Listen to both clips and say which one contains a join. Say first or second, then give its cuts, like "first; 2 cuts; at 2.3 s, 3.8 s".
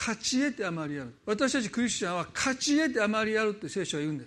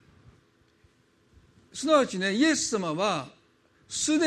first; 1 cut; at 1.2 s